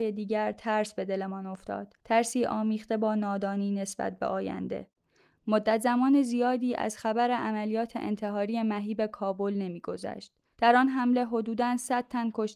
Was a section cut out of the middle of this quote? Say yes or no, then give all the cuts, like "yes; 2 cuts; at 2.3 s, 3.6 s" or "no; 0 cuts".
yes; 1 cut; at 2.0 s